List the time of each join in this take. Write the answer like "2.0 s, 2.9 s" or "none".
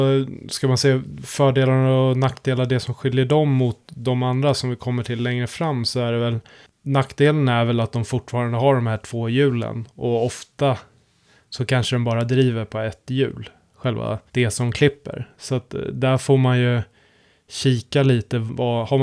14.3 s